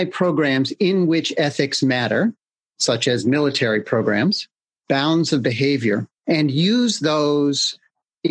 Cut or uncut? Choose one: cut